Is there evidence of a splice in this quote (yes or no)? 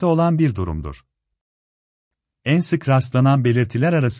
yes